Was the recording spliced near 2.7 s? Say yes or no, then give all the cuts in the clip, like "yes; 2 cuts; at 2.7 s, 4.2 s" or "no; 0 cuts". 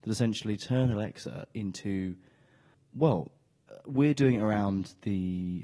yes; 1 cut; at 2.7 s